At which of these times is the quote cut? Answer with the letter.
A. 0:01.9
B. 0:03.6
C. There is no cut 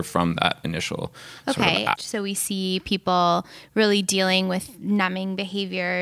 A